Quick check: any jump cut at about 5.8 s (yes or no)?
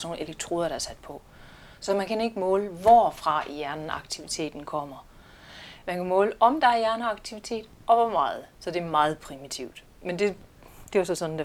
no